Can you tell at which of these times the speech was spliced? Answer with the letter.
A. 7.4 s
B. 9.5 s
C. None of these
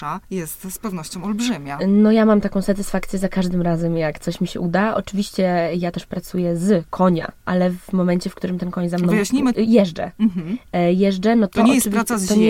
B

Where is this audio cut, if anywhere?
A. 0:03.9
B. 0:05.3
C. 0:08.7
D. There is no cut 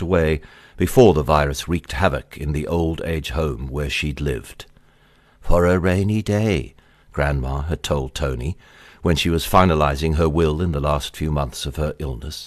B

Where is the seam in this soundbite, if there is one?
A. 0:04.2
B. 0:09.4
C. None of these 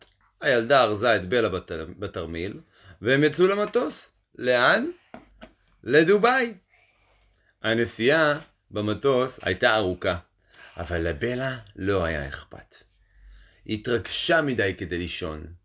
B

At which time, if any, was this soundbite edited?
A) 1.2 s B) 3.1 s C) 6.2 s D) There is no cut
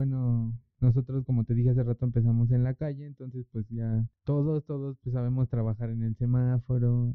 D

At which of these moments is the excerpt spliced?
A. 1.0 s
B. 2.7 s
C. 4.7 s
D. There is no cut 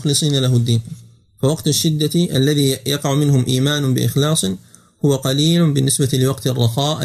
D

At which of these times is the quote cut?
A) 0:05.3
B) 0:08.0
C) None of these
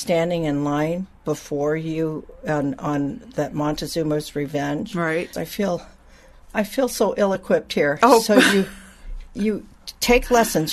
A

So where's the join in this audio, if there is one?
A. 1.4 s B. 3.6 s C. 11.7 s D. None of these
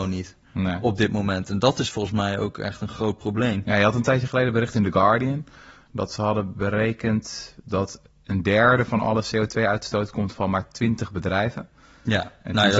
D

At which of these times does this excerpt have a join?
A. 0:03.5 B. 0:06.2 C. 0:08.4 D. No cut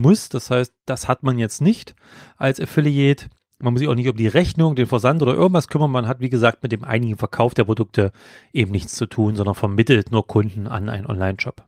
D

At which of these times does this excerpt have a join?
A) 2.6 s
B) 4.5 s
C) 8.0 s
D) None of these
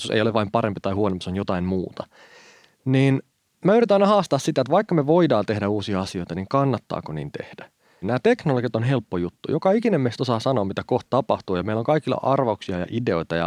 C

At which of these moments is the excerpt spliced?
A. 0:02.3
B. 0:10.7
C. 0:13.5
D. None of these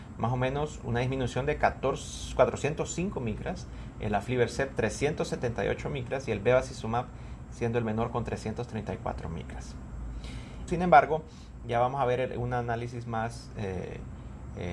B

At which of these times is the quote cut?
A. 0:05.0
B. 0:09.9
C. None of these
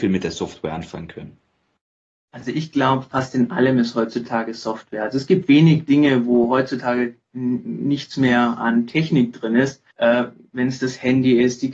B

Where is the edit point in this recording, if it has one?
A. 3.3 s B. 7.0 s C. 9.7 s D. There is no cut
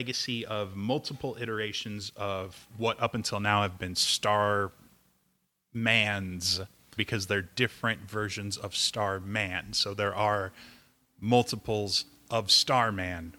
B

